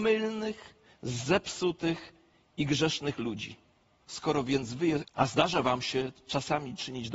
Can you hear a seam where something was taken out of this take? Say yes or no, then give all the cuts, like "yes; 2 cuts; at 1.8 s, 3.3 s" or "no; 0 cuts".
yes; 2 cuts; at 4.0 s, 5.0 s